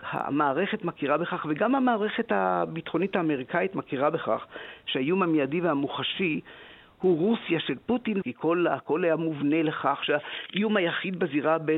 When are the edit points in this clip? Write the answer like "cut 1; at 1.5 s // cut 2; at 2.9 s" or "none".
cut 1; at 8.2 s